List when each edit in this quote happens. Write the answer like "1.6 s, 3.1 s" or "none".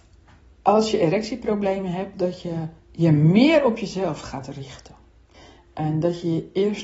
2.8 s

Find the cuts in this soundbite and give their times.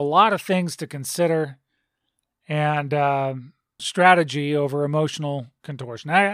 3.8 s

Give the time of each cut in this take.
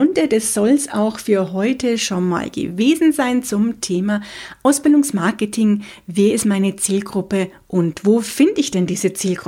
none

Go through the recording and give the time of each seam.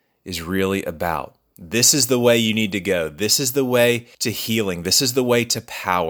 1.5 s, 4.1 s

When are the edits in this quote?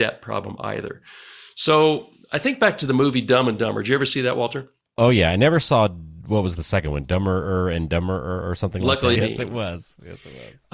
9.1 s

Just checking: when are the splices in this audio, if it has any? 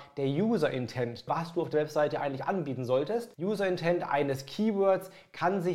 1.3 s, 3.3 s

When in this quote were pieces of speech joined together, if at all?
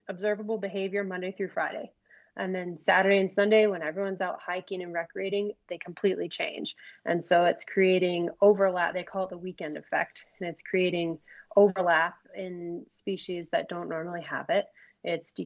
none

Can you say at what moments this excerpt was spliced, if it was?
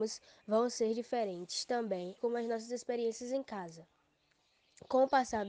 2.2 s

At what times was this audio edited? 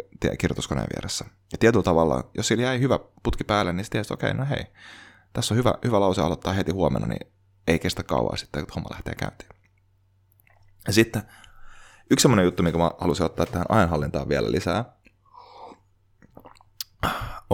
none

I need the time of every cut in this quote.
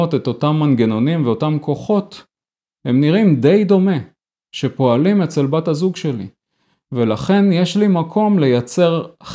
none

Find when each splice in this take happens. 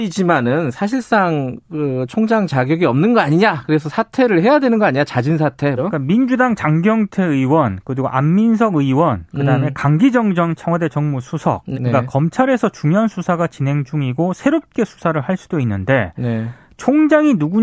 5.8 s, 11.7 s

